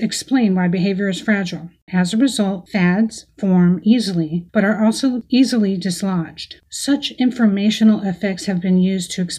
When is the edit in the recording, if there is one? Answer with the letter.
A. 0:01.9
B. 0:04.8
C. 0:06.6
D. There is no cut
A